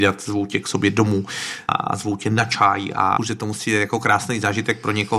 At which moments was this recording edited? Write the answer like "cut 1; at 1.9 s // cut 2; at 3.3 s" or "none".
cut 1; at 1.7 s // cut 2; at 3.2 s